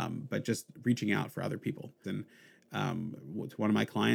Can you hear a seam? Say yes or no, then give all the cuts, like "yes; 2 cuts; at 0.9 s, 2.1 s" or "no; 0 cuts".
yes; 1 cut; at 2.0 s